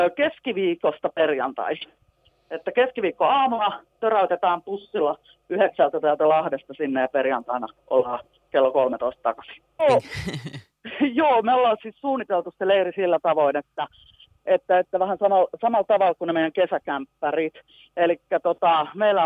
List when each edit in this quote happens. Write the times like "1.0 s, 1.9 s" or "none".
9.8 s